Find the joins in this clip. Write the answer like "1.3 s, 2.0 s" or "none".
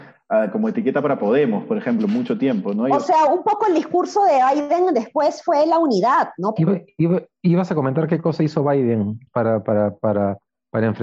6.6 s, 9.3 s